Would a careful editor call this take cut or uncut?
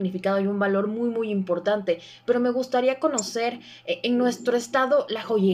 uncut